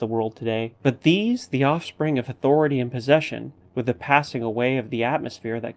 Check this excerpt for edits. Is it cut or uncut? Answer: cut